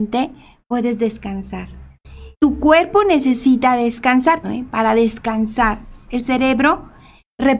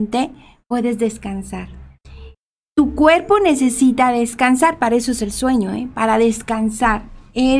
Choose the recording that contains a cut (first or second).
first